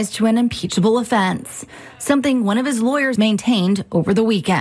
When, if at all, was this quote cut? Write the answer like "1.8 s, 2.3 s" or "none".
3.2 s